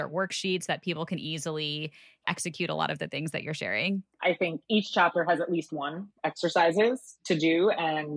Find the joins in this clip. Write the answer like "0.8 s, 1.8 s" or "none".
4.2 s, 6.2 s